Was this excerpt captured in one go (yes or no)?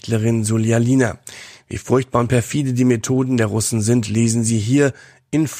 yes